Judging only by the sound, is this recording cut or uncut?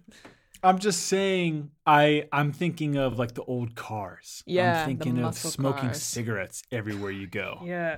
uncut